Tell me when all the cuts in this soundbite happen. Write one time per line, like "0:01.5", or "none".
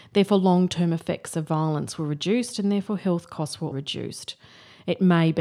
0:03.7